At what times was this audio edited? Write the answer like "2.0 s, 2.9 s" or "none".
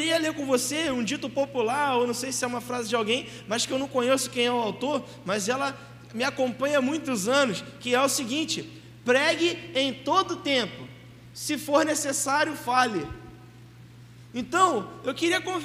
none